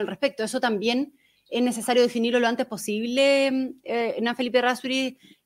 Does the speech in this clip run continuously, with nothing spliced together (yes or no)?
yes